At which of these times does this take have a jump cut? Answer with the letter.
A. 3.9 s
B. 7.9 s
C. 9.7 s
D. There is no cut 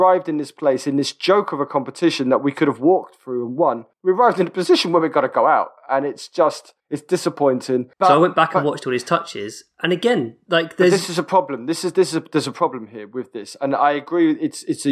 B